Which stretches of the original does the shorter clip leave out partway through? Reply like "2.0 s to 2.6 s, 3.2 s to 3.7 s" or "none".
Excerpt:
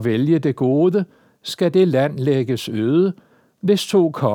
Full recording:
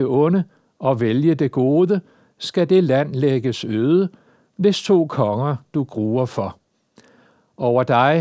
none